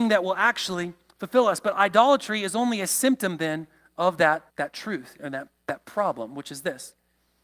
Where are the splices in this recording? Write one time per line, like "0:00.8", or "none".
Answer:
0:04.5